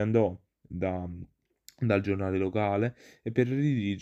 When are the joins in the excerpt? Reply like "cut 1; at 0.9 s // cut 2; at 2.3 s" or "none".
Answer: none

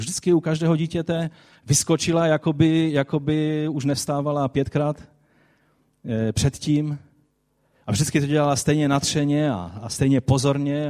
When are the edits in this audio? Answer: none

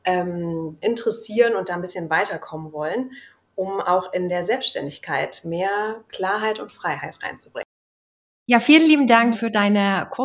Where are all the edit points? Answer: cut 1; at 9.3 s

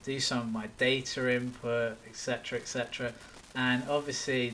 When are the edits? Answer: cut 1; at 3.5 s

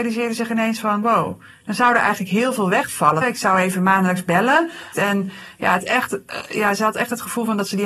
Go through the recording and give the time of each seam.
cut 1; at 3.2 s // cut 2; at 4.9 s

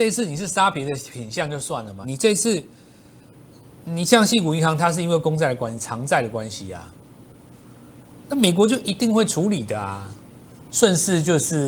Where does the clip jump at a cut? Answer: cut 1; at 2.0 s // cut 2; at 10.6 s

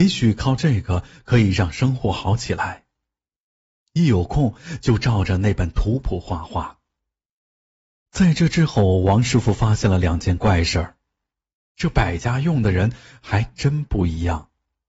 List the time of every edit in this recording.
cut 1; at 11.6 s

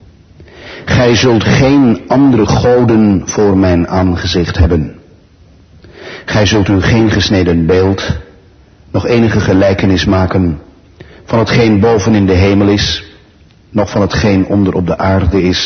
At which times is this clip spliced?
none

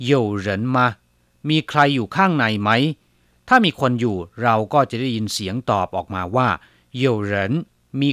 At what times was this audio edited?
none

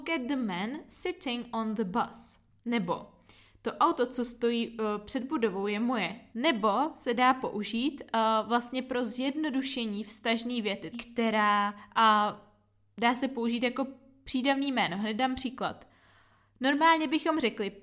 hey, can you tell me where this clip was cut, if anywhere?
cut 1; at 6.3 s // cut 2; at 10.9 s

